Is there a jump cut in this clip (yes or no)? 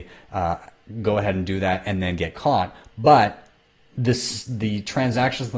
no